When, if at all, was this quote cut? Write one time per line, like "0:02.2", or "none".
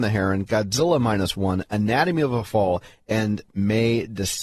none